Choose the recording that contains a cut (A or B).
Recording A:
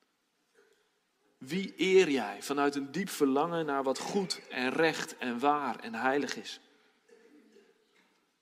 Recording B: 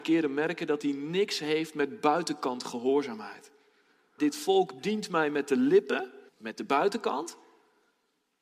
B